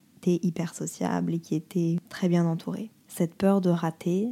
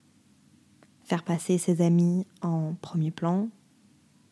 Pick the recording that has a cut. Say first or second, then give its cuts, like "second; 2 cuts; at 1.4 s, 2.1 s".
first; 1 cut; at 3.1 s